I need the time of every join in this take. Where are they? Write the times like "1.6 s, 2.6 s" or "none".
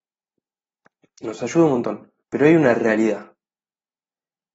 2.2 s